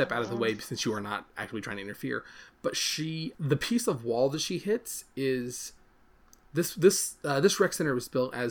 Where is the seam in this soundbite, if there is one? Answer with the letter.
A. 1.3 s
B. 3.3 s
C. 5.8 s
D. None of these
B